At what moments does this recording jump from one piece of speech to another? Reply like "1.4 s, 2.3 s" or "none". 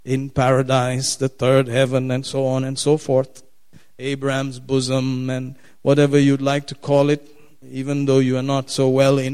none